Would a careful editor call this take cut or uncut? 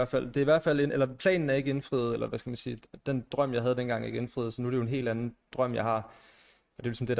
uncut